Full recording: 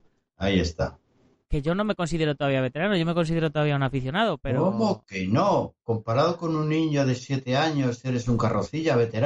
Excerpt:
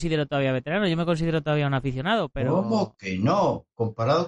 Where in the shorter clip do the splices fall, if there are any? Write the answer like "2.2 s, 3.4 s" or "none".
none